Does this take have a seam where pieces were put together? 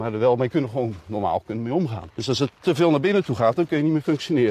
yes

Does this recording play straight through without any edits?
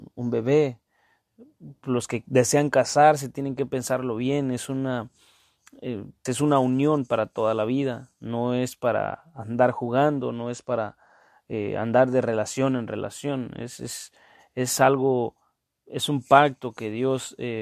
no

